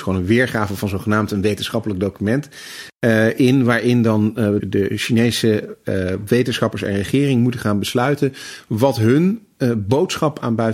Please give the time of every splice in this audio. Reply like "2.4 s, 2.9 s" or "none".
4.6 s